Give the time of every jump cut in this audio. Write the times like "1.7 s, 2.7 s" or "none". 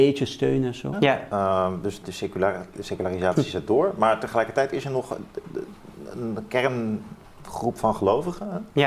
0.9 s, 2.0 s